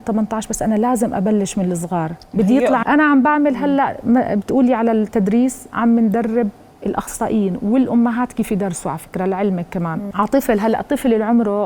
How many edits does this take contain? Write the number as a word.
two